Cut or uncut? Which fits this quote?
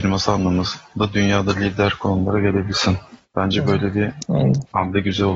uncut